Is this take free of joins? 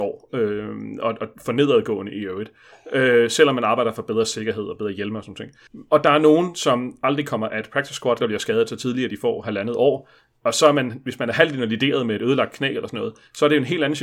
no; 1 cut; at 8.2 s

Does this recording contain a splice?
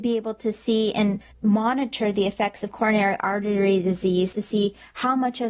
yes; 1 cut; at 4.3 s

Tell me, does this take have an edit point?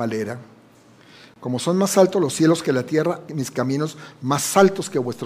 yes; 1 cut; at 3.3 s

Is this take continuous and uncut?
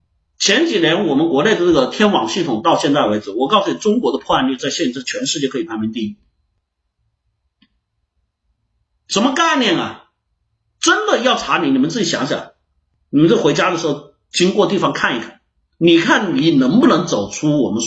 yes; 0 cuts

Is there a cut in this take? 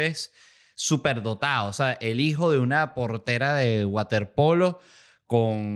no; 0 cuts

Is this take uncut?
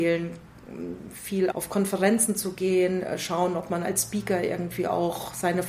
no; 1 cut; at 1.5 s

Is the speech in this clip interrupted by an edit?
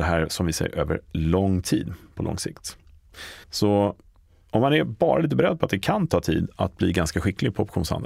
yes; 1 cut; at 3.4 s

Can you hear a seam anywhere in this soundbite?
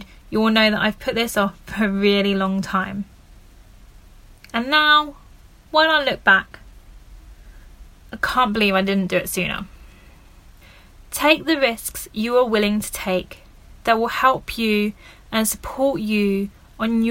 no; 0 cuts

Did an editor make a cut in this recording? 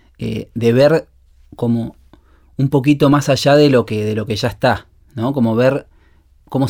no; 0 cuts

